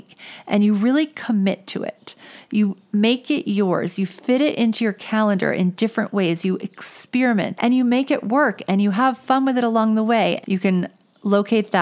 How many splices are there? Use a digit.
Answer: 2